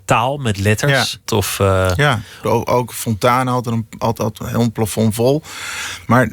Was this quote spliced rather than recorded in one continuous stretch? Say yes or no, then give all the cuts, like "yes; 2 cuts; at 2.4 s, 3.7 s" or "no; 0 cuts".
yes; 2 cuts; at 1.3 s, 2.4 s